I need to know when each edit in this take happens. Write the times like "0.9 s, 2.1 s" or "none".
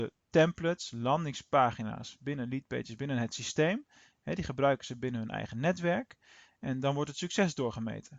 none